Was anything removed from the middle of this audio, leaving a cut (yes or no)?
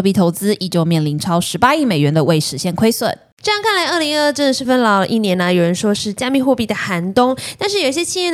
yes